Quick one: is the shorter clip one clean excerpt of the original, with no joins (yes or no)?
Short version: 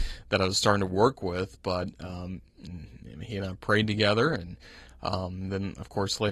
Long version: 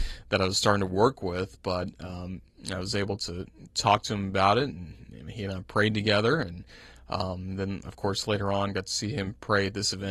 no